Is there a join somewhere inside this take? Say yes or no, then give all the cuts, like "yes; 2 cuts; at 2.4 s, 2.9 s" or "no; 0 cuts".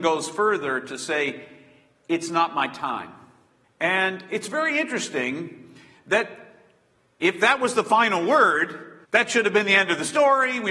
yes; 2 cuts; at 3.6 s, 9.0 s